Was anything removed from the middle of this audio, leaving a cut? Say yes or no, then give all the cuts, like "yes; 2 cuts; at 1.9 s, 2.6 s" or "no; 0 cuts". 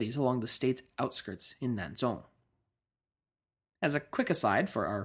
no; 0 cuts